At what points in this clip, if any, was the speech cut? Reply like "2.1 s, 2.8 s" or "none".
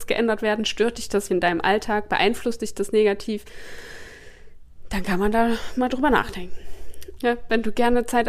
1.3 s, 7.2 s